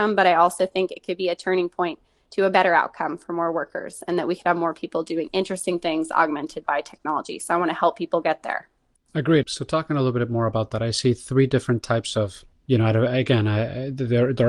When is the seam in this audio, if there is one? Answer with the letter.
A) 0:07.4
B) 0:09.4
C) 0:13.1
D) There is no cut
B